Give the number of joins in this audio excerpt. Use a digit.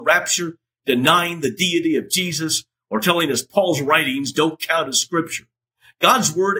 0